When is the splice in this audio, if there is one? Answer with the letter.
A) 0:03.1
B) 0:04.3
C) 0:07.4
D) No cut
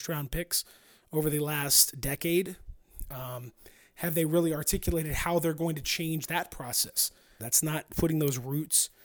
C